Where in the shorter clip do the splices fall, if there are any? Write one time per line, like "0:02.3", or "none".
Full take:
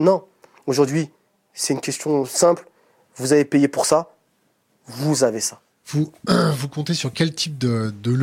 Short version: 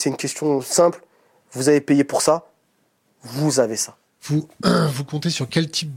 none